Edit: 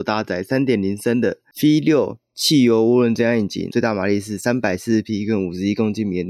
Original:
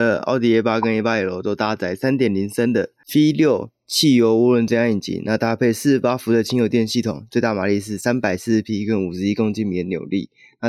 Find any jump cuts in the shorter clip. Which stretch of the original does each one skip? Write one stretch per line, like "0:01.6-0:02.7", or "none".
0:05.2-0:07.3